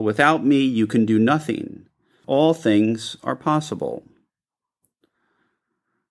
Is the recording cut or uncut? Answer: cut